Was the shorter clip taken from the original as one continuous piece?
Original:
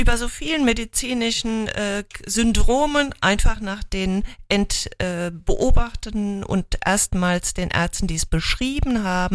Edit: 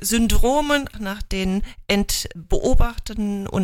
no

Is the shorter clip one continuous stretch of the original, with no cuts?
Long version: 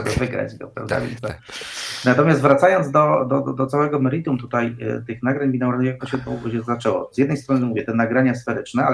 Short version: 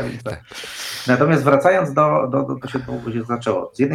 no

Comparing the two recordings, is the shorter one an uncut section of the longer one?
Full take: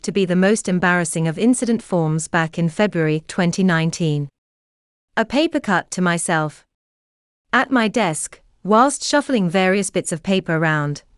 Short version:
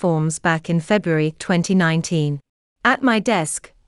no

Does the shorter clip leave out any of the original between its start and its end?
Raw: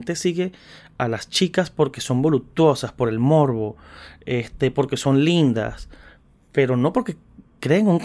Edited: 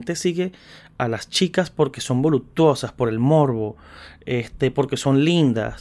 no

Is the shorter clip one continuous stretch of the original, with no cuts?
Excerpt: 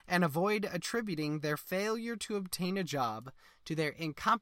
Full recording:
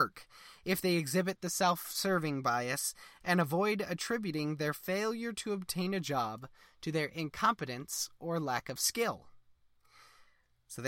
yes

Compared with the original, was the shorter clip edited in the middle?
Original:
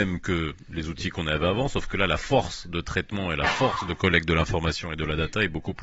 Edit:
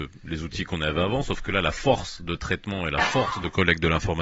no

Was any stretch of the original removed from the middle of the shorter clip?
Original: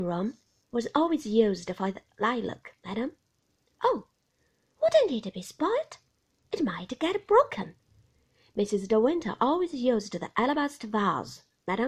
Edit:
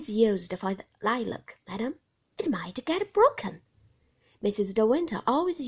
yes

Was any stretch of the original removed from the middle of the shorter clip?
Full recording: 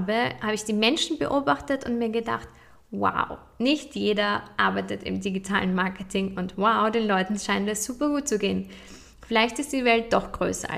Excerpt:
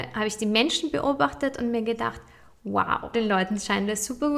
yes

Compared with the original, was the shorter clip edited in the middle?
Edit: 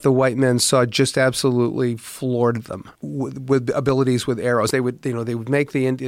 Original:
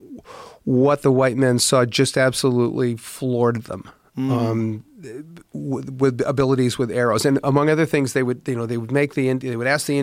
yes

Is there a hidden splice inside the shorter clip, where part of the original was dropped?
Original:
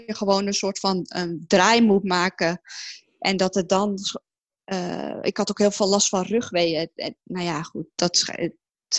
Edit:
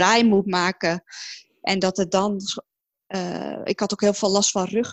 no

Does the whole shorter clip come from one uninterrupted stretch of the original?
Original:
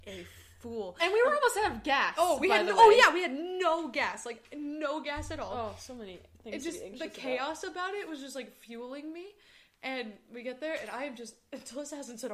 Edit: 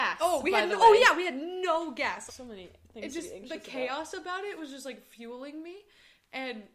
no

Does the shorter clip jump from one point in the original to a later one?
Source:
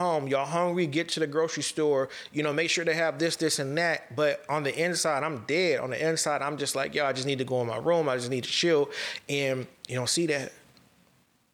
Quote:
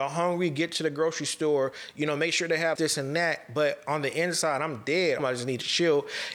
yes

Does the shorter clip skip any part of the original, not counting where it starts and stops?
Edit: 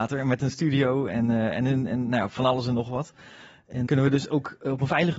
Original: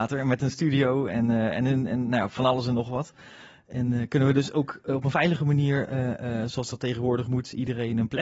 yes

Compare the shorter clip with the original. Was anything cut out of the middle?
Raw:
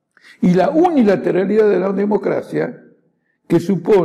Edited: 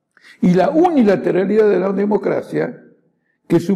no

